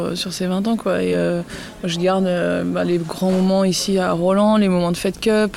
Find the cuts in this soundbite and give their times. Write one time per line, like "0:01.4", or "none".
none